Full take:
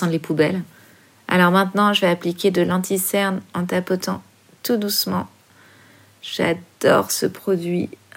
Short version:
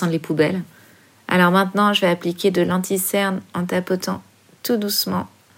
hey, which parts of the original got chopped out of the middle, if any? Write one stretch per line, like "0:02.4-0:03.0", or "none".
none